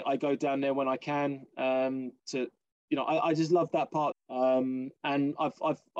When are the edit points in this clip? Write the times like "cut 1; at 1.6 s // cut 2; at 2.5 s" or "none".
cut 1; at 4.1 s